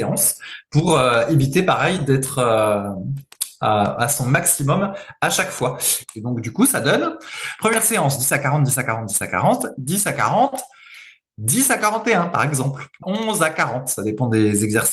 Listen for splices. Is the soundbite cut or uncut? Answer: cut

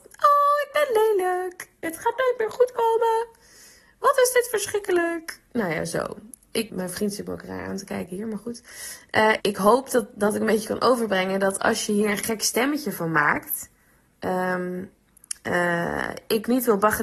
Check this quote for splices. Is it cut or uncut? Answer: cut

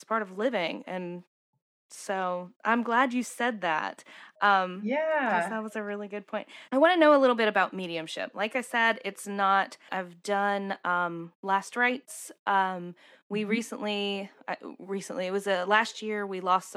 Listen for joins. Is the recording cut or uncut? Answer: cut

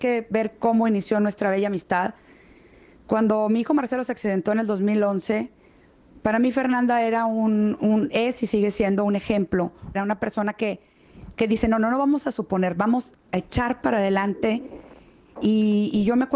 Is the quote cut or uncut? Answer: cut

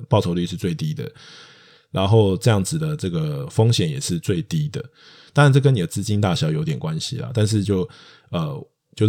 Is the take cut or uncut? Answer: cut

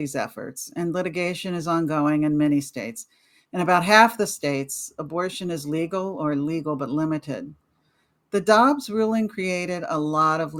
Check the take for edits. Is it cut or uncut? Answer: uncut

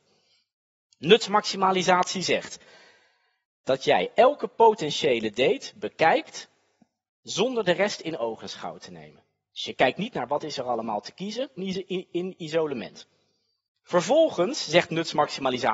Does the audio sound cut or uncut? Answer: cut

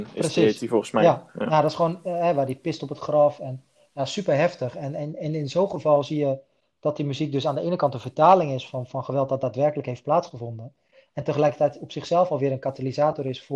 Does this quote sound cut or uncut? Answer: uncut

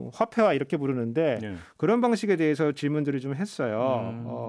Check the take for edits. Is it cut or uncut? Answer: uncut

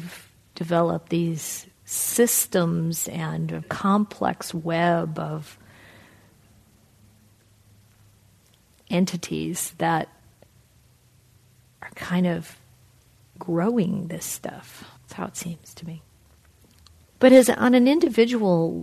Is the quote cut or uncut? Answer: cut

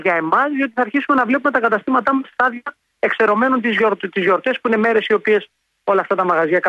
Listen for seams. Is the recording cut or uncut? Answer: uncut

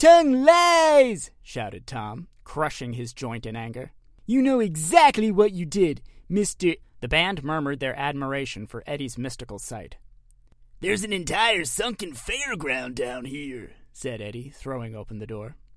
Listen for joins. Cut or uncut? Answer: cut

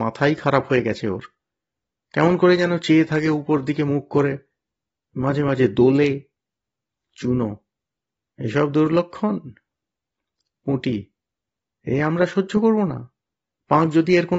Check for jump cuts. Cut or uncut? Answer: uncut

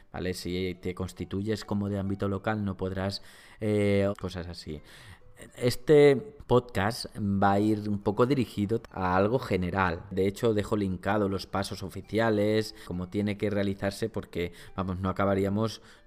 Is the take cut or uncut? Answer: cut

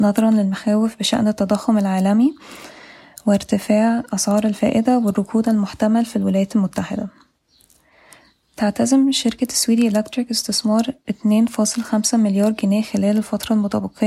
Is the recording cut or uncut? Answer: uncut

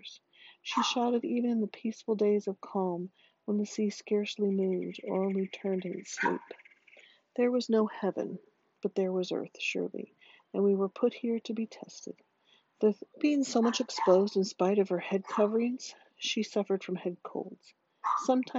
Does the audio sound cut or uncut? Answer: cut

